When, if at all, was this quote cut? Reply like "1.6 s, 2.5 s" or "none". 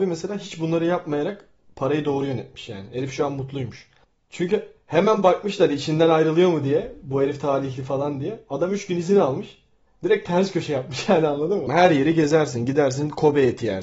11.7 s

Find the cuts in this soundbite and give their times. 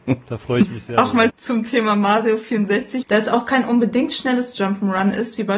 1.3 s, 3.0 s

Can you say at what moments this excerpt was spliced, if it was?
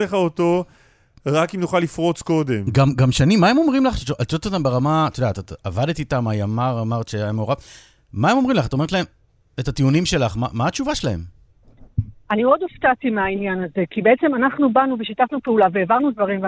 none

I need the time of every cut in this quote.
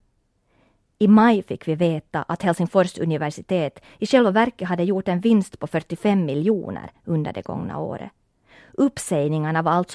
none

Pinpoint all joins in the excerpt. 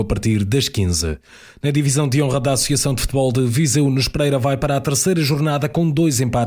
none

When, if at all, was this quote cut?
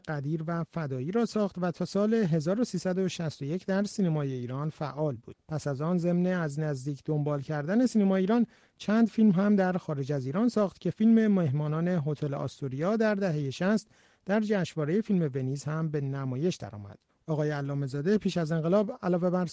17.2 s

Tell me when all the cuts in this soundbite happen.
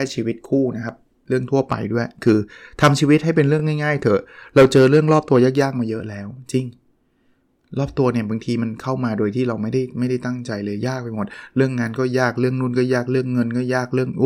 none

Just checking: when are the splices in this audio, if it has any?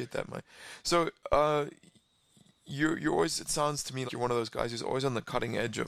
4.1 s

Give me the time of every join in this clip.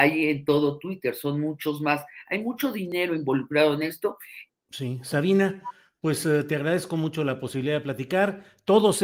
4.5 s

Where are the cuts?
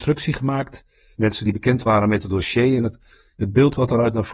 1.2 s

